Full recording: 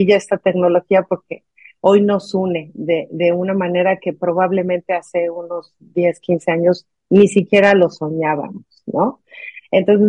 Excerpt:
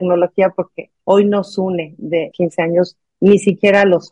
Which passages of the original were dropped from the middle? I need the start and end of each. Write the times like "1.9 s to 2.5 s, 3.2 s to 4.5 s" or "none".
1.5 s to 1.8 s, 3.1 s to 6.2 s